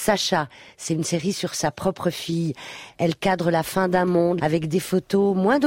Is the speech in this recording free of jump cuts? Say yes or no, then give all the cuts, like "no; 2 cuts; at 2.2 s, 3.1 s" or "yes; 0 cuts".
no; 1 cut; at 4.4 s